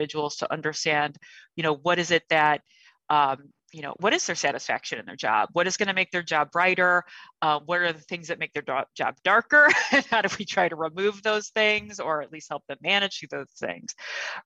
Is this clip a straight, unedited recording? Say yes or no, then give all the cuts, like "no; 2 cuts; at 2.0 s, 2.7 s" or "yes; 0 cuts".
no; 1 cut; at 4.0 s